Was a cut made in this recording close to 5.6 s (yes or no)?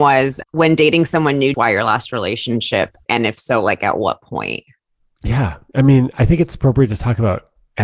no